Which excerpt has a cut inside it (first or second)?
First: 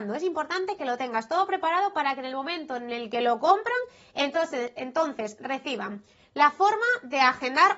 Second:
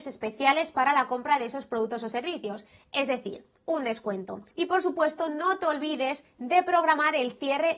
second